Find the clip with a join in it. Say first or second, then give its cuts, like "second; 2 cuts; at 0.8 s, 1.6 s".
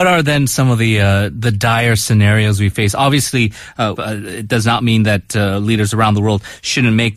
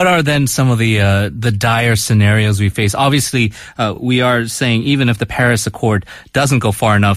first; 1 cut; at 4.0 s